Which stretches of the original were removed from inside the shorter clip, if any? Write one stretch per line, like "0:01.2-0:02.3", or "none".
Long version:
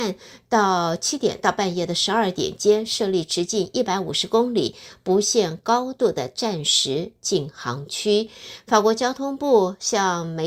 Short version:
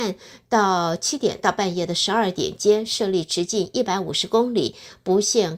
none